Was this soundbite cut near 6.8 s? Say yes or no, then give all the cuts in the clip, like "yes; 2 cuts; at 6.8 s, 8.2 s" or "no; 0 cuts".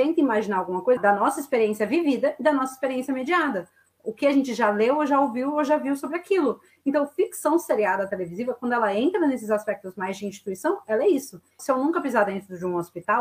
no; 2 cuts; at 1.0 s, 11.6 s